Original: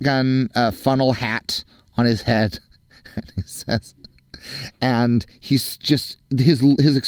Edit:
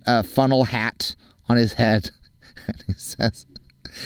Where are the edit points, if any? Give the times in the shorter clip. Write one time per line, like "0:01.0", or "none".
none